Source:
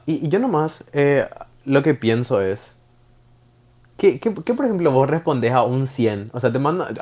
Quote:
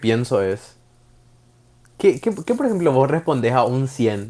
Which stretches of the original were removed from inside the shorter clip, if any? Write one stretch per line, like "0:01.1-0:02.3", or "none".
none